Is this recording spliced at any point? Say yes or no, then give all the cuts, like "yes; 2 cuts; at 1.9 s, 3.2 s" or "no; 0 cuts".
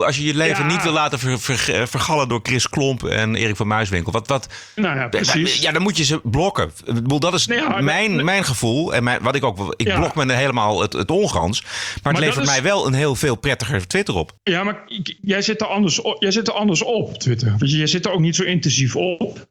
yes; 1 cut; at 14.4 s